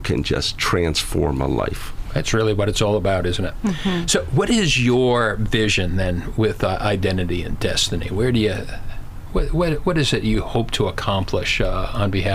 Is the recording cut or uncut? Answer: uncut